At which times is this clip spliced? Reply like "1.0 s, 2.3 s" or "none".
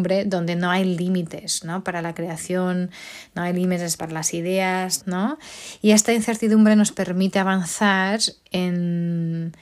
4.0 s, 5.0 s